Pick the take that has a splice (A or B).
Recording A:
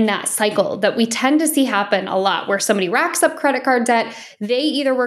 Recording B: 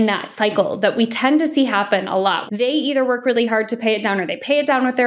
B